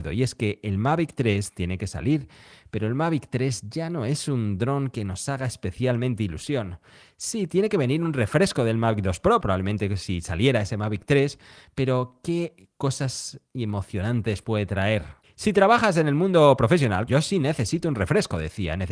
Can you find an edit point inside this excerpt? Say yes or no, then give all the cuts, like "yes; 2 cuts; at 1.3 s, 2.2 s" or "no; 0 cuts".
yes; 3 cuts; at 9.4 s, 15.2 s, 17.1 s